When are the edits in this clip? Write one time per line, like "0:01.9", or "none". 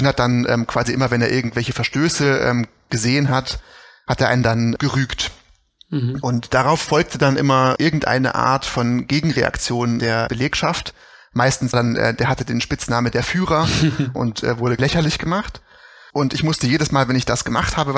0:11.7
0:16.1